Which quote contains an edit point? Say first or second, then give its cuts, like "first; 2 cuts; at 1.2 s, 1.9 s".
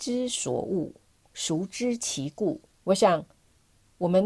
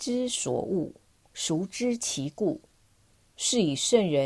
first; 1 cut; at 2.8 s